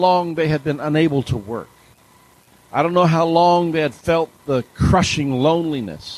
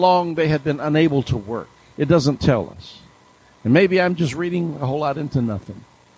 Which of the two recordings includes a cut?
second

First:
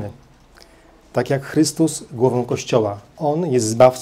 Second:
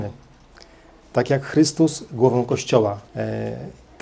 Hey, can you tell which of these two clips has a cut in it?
second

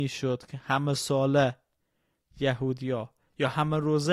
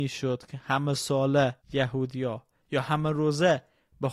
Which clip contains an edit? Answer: second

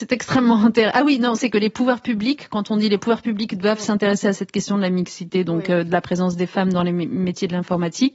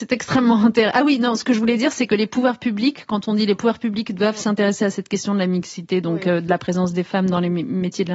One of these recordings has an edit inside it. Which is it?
first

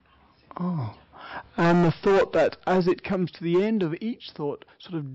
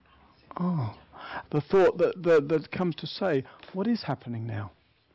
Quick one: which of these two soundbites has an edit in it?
second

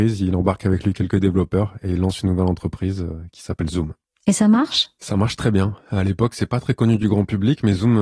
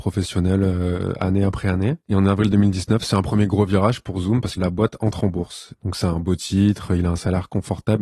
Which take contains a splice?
second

